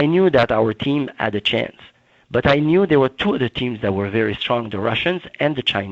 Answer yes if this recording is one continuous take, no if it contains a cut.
yes